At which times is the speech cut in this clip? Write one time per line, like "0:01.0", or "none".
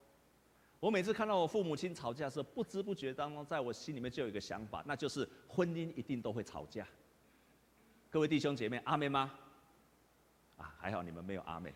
none